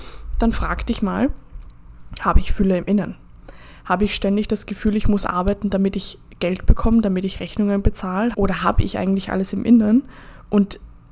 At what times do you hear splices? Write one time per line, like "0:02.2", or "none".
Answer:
0:08.3